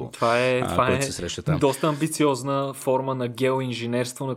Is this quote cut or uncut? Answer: uncut